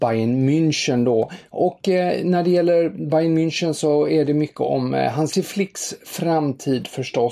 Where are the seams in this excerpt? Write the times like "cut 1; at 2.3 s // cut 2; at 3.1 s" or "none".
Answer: none

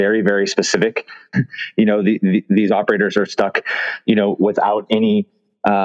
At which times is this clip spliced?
cut 1; at 1.3 s

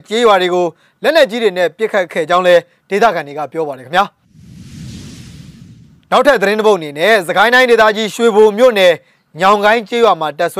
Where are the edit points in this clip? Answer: none

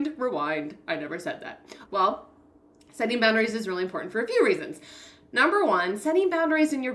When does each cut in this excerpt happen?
cut 1; at 1.8 s

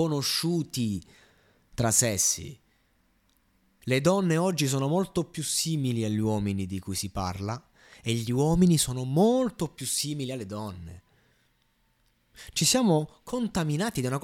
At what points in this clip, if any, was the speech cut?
cut 1; at 3.8 s

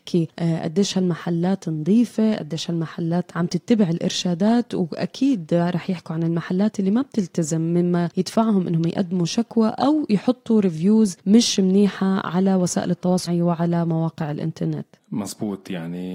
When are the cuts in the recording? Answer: cut 1; at 13.3 s

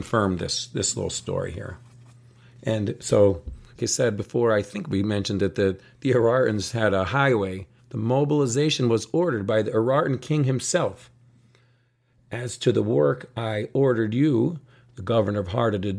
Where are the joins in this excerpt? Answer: cut 1; at 3.8 s // cut 2; at 7.8 s

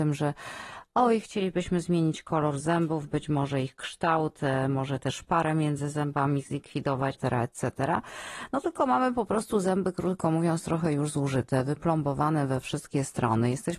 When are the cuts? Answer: cut 1; at 7.1 s

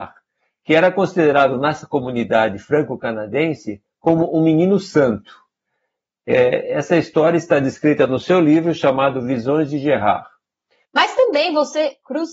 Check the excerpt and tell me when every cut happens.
cut 1; at 10.8 s

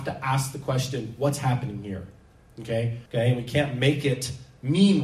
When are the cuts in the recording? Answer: cut 1; at 3.1 s

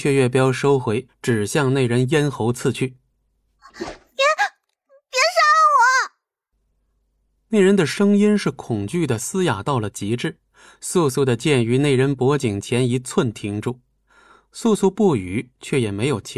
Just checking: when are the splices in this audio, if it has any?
cut 1; at 1.1 s

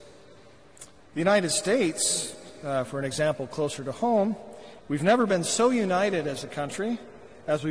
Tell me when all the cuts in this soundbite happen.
cut 1; at 1.0 s // cut 2; at 4.8 s

